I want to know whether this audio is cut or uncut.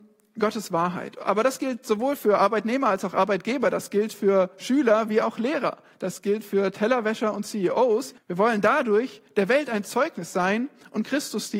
cut